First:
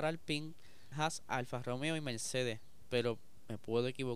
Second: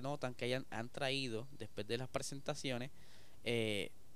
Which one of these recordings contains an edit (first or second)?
first